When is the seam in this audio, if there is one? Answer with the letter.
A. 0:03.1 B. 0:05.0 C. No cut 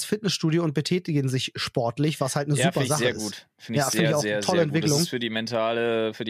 C